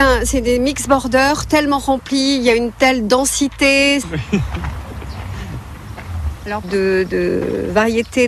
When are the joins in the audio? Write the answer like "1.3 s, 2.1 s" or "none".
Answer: 4.0 s, 6.6 s

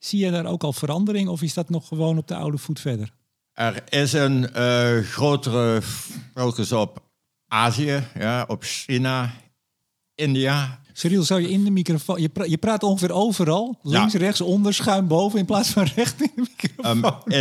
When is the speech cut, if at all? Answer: 10.8 s

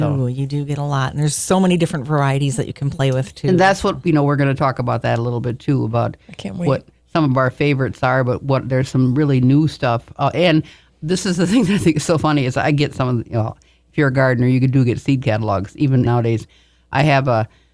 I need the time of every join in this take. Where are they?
16.1 s

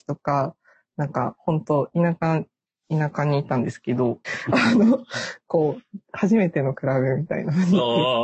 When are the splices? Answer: 4.2 s, 6.0 s

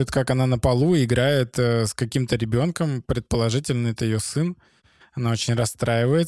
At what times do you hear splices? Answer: none

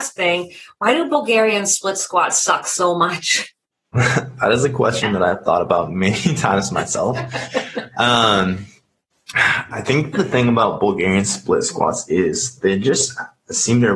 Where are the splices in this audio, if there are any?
none

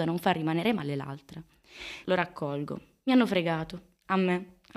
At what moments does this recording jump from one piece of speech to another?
2.0 s

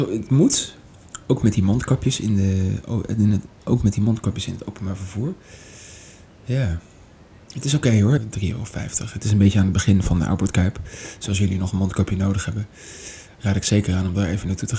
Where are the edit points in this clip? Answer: 8.2 s

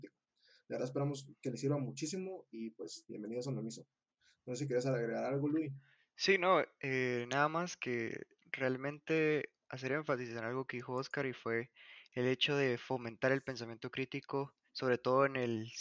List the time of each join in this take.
none

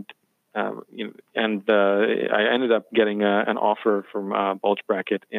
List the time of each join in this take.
none

